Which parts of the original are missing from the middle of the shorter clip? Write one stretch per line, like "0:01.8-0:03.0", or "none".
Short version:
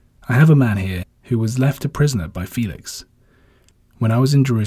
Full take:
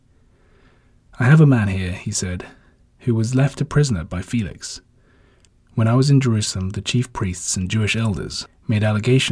0:01.9-0:02.8